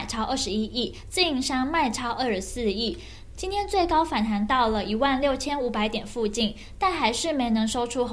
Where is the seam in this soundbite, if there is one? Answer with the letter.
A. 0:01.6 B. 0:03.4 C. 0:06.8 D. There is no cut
B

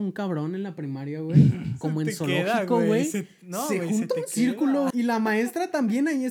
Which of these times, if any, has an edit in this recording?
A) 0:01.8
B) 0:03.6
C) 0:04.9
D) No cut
C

